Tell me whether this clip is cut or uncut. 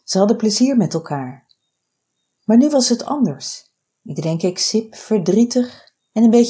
cut